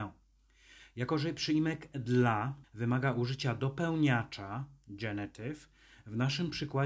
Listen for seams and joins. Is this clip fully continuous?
no; 1 cut; at 2.6 s

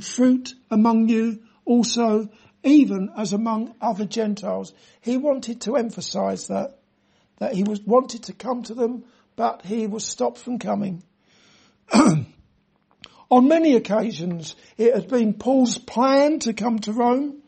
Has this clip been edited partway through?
no; 0 cuts

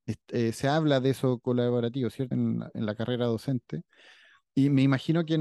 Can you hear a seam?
yes; 1 cut; at 2.3 s

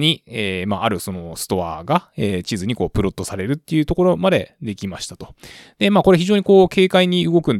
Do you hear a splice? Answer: no; 0 cuts

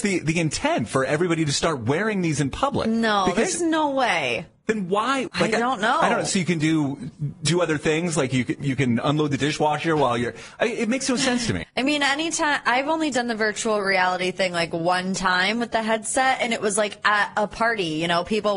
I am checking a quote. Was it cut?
yes; 2 cuts; at 5.3 s, 11.6 s

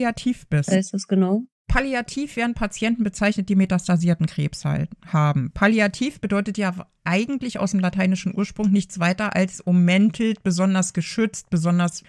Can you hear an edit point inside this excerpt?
no; 0 cuts

